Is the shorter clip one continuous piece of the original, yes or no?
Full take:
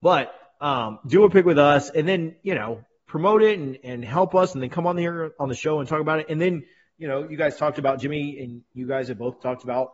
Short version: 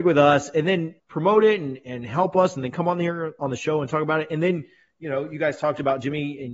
no